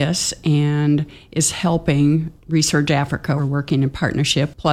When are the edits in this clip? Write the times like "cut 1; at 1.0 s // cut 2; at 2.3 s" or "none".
none